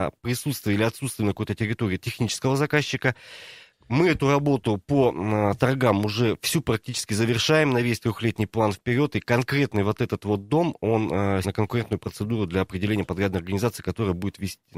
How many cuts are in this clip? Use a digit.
1